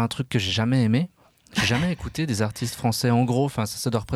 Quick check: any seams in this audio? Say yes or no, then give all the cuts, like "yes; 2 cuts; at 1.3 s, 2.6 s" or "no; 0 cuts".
no; 0 cuts